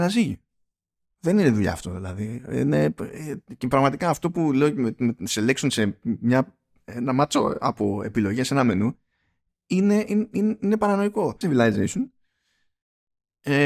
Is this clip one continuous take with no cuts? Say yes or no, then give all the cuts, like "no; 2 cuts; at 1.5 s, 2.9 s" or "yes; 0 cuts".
no; 1 cut; at 11.4 s